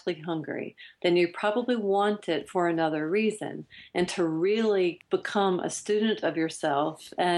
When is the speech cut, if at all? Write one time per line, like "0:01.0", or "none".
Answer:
none

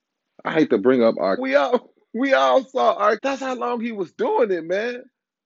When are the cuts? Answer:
0:01.4
0:03.2

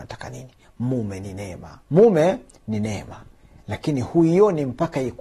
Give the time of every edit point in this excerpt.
0:01.8

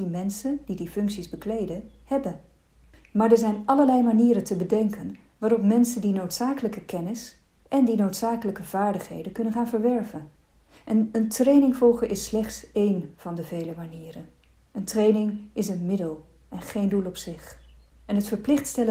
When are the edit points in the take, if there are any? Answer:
0:17.9

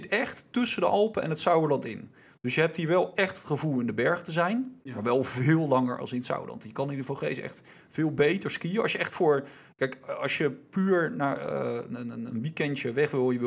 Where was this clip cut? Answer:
0:04.8

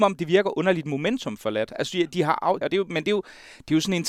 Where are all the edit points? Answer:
0:02.6

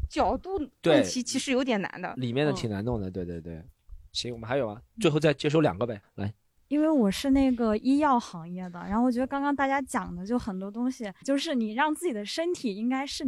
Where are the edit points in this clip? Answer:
0:06.0
0:11.2

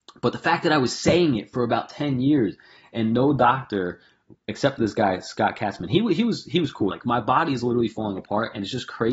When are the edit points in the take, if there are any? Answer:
0:06.9

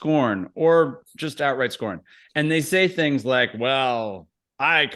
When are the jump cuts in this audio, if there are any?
none

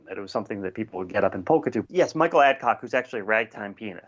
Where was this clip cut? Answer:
0:01.8

